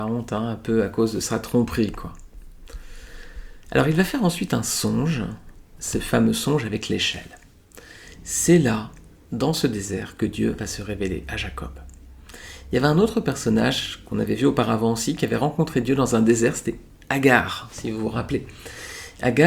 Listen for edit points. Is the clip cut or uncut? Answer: uncut